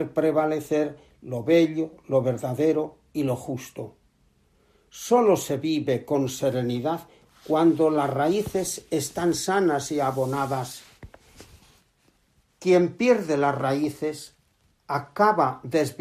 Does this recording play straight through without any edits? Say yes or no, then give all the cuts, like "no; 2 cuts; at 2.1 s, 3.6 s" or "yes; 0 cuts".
yes; 0 cuts